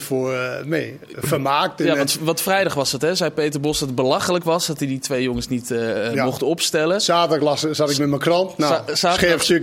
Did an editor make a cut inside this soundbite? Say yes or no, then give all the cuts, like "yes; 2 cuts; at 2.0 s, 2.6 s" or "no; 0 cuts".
no; 0 cuts